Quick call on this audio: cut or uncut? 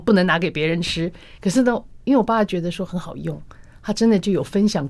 uncut